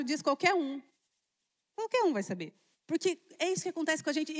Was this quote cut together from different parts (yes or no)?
yes